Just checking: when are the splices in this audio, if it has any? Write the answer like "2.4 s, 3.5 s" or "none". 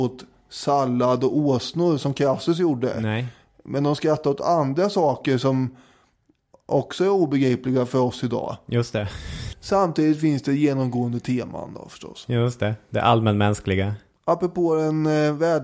9.5 s